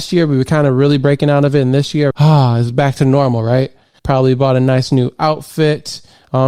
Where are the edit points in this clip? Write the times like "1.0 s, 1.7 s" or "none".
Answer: 2.1 s, 4.0 s